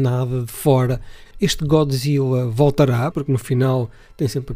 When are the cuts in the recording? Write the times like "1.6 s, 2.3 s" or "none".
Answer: 1.2 s, 3.1 s